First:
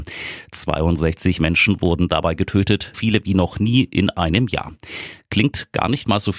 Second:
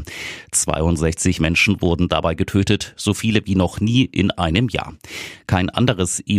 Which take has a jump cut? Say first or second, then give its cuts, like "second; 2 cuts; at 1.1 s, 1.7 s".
first; 2 cuts; at 2.9 s, 5.2 s